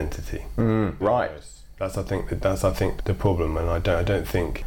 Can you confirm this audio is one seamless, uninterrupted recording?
no; 2 cuts; at 1.0 s, 3.0 s

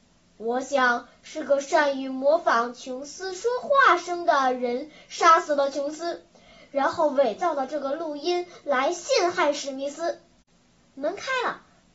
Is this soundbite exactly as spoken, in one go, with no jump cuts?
no; 1 cut; at 10.8 s

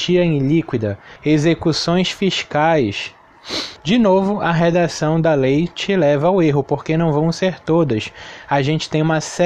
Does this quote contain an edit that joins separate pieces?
yes; 2 cuts; at 1.2 s, 3.8 s

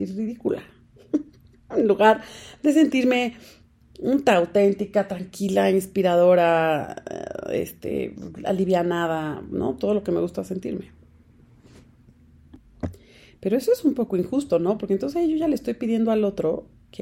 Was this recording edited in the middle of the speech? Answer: no; 0 cuts

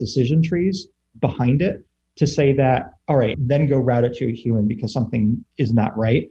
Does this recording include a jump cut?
yes; 1 cut; at 3.3 s

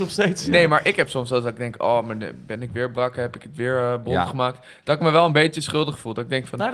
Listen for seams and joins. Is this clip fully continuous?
yes; 0 cuts

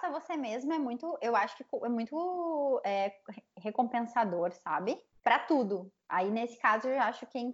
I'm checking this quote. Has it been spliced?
no; 0 cuts

